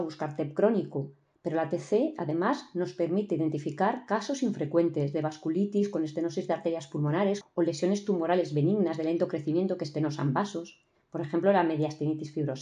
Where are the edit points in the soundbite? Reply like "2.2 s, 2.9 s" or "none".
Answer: 7.4 s